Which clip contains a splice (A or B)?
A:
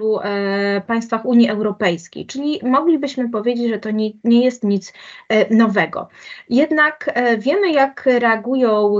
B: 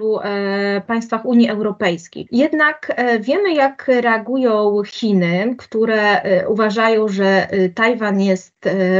B